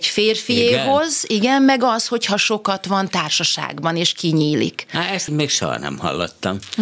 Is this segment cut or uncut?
cut